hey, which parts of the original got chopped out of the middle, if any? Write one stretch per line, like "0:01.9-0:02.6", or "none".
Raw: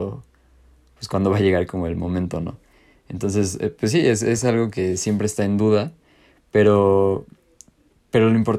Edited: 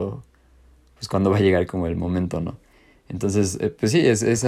none